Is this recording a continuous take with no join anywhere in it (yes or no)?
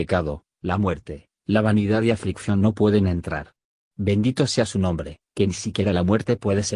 yes